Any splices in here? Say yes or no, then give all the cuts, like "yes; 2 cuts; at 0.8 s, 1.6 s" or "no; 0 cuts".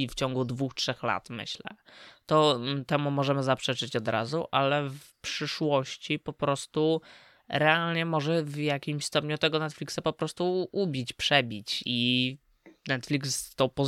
no; 0 cuts